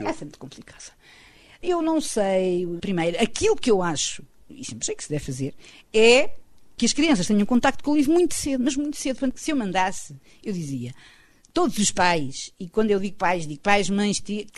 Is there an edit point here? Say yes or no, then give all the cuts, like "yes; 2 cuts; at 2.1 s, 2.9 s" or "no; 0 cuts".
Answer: no; 0 cuts